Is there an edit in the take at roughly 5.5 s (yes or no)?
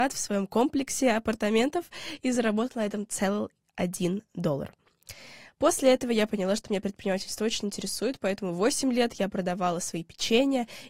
no